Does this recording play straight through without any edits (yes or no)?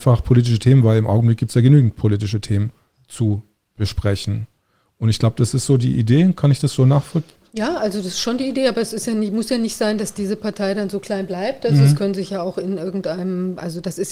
yes